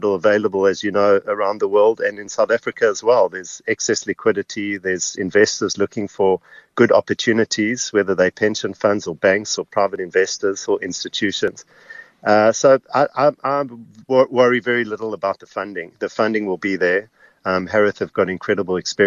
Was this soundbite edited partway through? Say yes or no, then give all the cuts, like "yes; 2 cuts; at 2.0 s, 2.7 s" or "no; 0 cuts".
no; 0 cuts